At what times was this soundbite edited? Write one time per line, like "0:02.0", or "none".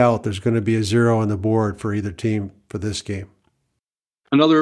none